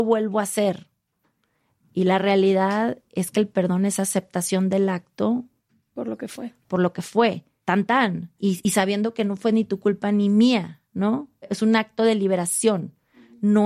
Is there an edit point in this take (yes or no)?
no